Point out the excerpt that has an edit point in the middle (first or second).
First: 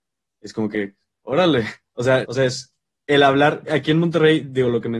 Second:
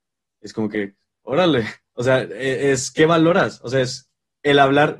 first